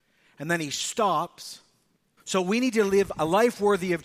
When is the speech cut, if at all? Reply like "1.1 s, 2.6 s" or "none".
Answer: 2.2 s